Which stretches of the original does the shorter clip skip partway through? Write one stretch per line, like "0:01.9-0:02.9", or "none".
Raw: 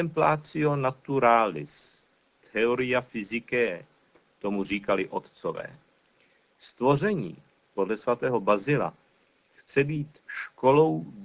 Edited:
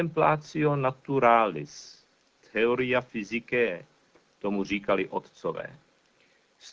none